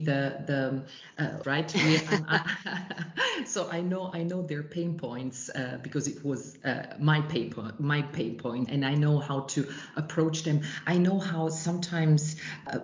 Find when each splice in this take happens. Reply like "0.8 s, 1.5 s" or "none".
1.4 s, 8.7 s